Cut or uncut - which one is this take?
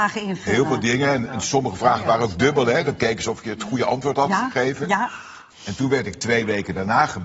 cut